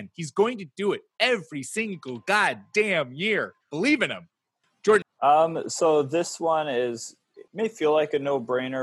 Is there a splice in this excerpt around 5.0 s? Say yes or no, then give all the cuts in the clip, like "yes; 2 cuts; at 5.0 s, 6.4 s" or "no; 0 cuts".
yes; 2 cuts; at 5.0 s, 7.5 s